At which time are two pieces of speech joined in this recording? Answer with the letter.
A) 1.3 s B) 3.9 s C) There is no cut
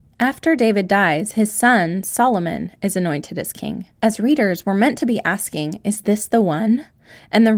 C